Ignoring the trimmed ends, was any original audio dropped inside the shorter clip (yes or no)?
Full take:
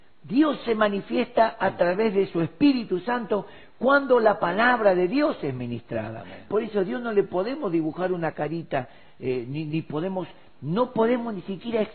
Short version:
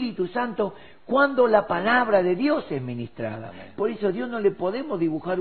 no